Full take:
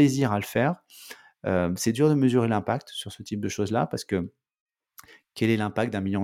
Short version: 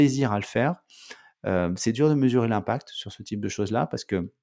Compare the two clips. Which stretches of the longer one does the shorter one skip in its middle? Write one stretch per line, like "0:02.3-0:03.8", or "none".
none